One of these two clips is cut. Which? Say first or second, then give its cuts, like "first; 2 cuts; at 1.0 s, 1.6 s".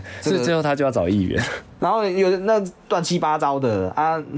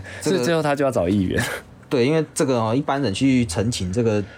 first; 1 cut; at 1.8 s